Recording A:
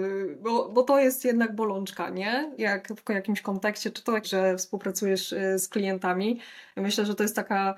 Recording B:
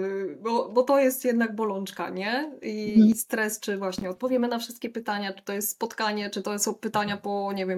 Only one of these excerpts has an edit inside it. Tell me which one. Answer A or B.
A